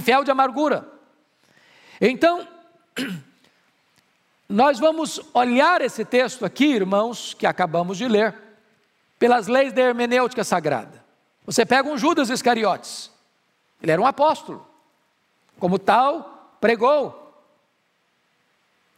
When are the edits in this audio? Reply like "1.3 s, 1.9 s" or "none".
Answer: 11.4 s